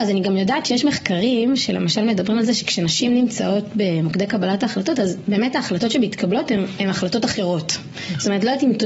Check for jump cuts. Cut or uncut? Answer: uncut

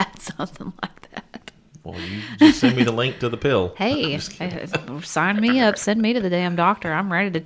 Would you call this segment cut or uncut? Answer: uncut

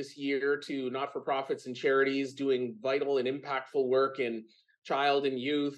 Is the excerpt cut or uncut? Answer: uncut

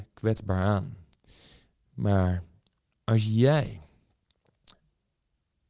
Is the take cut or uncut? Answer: uncut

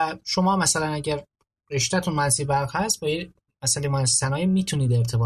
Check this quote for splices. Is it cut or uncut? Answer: uncut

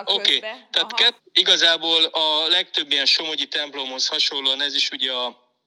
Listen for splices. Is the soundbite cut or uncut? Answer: cut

